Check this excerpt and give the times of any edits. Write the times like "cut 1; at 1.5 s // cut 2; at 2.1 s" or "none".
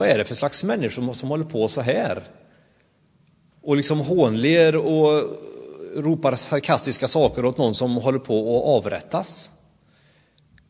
none